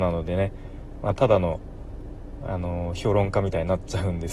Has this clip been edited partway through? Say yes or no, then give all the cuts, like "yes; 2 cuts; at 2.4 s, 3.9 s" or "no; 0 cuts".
no; 0 cuts